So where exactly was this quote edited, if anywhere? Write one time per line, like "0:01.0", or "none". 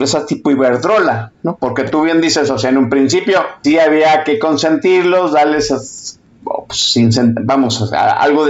0:03.6